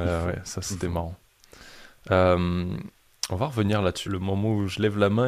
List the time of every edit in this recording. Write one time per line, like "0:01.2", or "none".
0:04.0